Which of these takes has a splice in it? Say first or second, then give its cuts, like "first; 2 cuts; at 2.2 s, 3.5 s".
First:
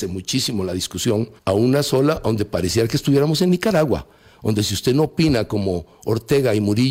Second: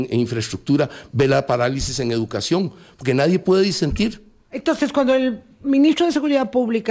first; 1 cut; at 1.4 s